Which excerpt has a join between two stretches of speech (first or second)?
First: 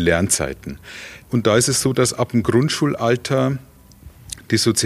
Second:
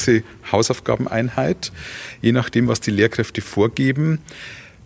first